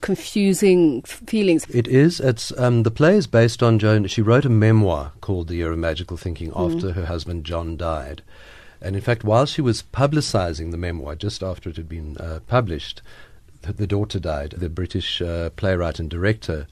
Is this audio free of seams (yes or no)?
no